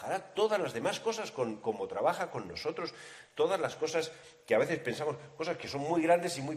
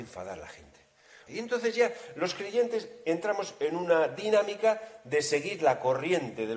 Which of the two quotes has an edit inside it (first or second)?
second